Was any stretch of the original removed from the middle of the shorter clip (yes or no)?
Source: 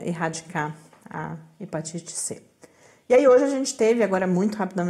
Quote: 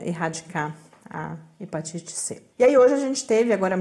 yes